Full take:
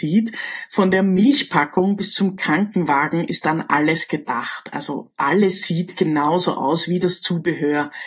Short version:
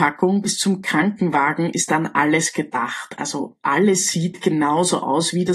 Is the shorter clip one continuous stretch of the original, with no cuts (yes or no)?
yes